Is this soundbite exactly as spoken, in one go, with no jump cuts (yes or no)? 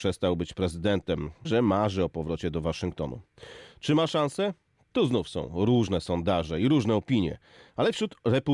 no